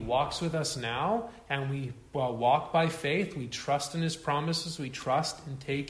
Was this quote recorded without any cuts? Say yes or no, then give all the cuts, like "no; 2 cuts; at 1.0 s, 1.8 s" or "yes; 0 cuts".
yes; 0 cuts